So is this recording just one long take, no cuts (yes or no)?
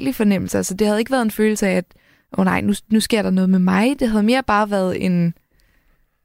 yes